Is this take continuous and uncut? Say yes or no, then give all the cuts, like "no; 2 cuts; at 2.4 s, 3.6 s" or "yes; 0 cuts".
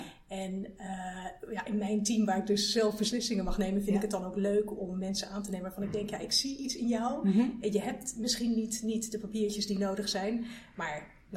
yes; 0 cuts